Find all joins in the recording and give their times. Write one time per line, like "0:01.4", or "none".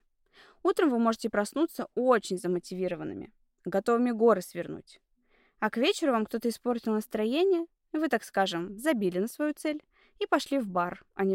none